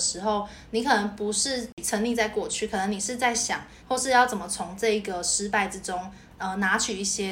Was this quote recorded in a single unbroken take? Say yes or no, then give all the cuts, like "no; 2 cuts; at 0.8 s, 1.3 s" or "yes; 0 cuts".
no; 1 cut; at 3.8 s